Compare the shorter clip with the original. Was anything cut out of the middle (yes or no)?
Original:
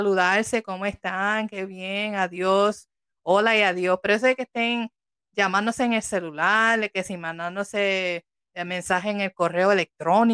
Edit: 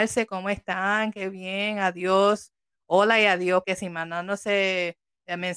yes